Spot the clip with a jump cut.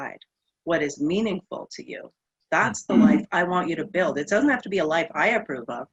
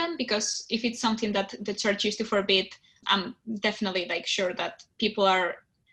second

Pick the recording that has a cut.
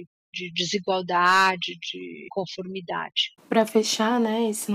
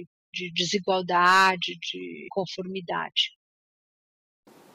first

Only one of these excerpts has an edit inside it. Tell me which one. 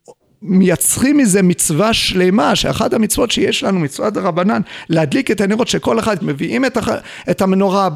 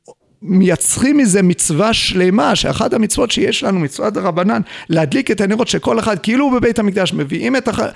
first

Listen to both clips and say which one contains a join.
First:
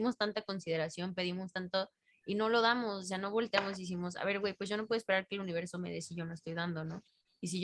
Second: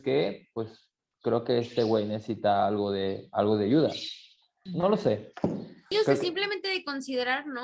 second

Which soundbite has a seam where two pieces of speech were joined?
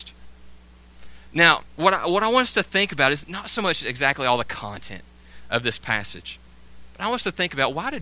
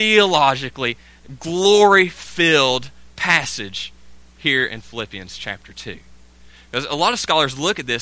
first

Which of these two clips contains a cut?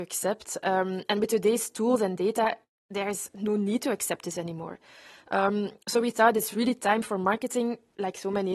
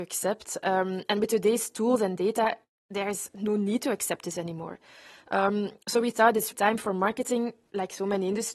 second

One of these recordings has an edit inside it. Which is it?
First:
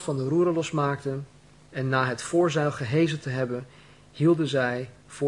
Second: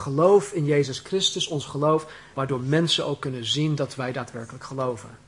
second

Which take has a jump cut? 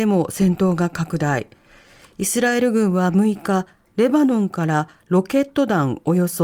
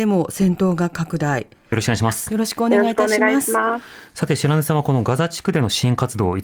second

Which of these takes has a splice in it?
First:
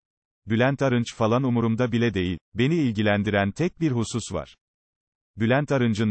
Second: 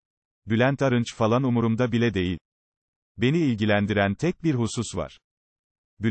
first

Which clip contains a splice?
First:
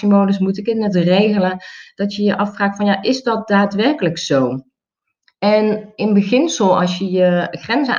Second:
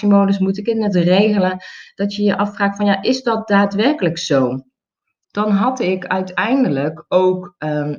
second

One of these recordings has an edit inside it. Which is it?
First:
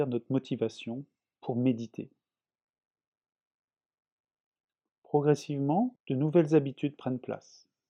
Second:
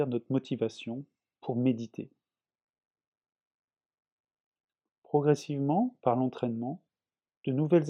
first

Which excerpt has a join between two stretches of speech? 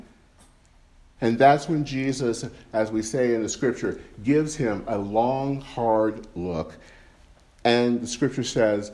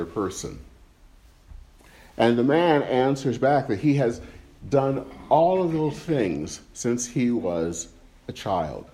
first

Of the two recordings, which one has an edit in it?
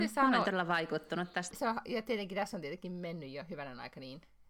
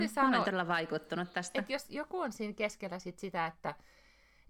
first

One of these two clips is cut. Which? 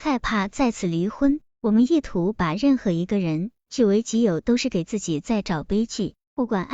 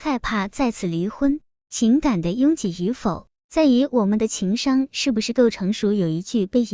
first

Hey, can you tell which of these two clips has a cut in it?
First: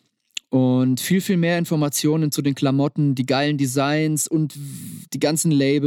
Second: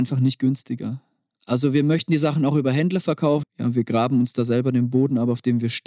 second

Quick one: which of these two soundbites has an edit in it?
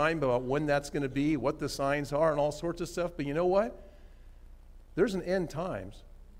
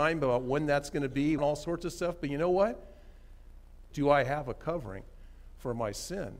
second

